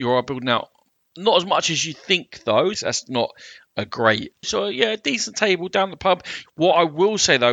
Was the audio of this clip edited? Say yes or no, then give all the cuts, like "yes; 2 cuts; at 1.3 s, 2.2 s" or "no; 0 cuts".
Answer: yes; 3 cuts; at 2.7 s, 4.4 s, 6.4 s